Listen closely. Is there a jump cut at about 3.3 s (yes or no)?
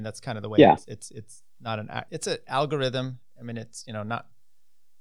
no